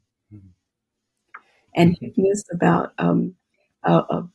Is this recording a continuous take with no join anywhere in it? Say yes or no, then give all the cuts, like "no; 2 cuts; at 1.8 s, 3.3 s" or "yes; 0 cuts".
no; 1 cut; at 1.7 s